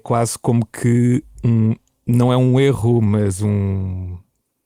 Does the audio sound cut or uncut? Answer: uncut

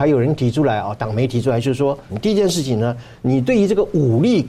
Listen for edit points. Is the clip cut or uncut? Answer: cut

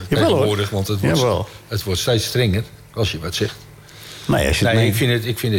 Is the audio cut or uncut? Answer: uncut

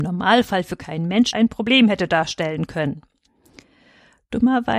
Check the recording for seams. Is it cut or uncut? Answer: cut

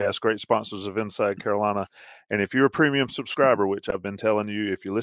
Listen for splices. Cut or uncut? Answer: uncut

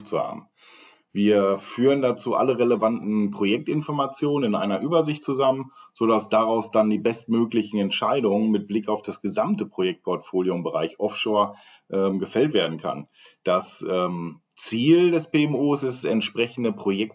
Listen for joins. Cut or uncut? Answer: uncut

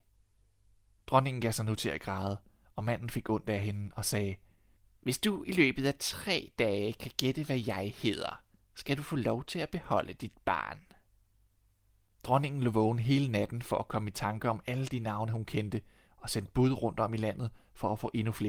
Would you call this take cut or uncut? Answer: uncut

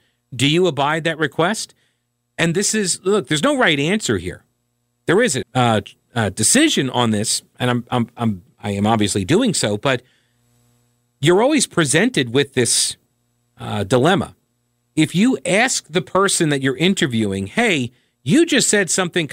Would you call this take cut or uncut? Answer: cut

